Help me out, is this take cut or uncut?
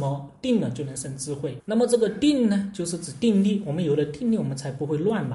cut